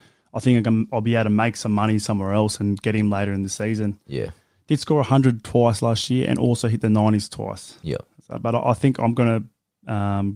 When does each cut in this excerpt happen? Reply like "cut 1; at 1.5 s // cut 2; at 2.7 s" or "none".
none